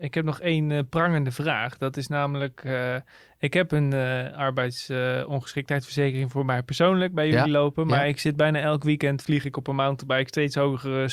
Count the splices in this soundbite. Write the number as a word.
zero